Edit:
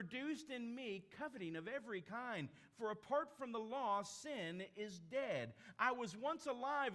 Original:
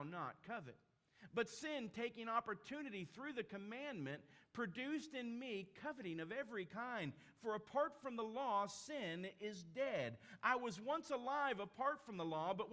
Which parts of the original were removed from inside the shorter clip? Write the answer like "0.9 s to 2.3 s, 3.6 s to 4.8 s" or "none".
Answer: none